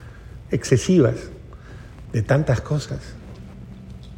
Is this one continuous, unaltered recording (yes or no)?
no